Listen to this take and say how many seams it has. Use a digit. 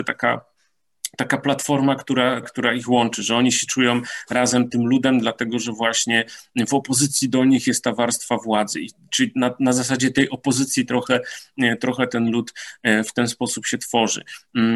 1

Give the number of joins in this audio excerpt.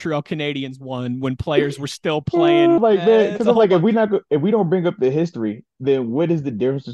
1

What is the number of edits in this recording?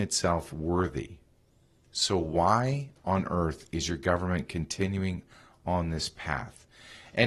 0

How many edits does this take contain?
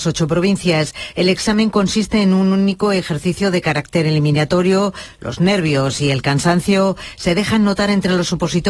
1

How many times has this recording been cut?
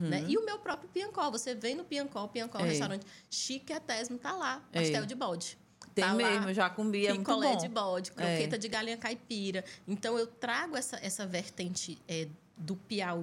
0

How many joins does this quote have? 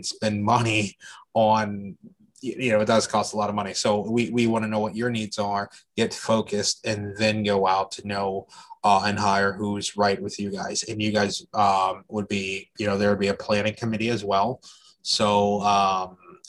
0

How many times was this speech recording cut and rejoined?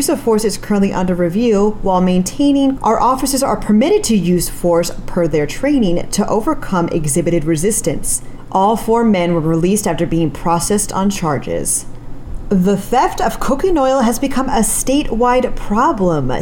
1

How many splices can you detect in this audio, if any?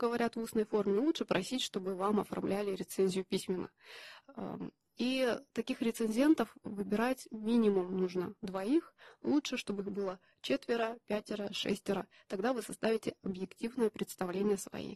0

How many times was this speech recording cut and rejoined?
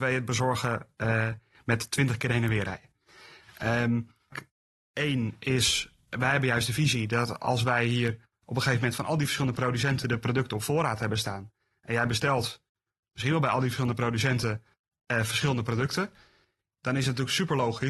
1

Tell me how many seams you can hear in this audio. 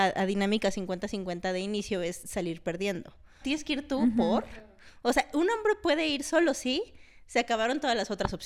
1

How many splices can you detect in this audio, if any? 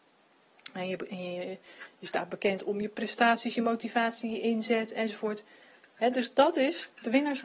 0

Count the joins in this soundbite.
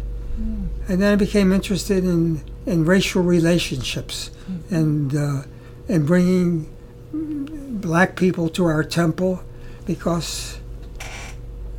1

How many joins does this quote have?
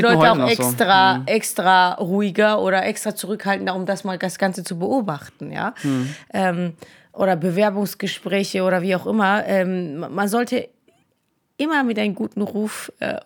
0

